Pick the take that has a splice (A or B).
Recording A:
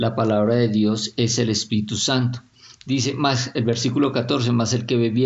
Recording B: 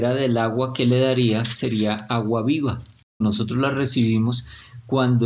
B